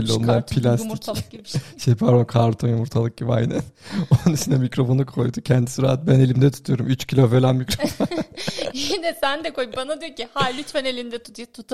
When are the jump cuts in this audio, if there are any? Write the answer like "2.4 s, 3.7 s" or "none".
none